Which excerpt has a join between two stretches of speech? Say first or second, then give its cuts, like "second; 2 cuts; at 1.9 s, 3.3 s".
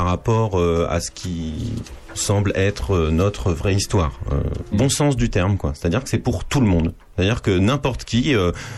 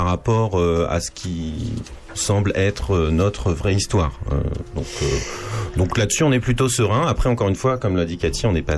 first; 1 cut; at 4.7 s